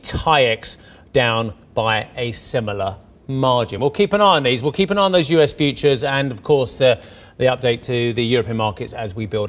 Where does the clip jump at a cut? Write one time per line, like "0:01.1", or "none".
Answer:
none

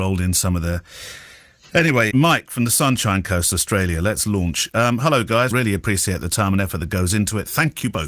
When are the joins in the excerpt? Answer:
0:02.1
0:05.5

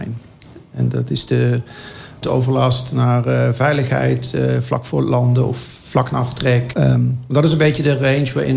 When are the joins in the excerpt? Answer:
0:02.2
0:06.7

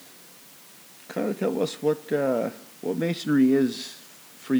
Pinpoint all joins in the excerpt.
0:02.8

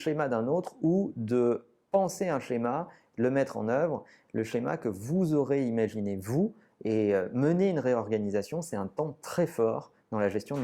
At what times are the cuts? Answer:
none

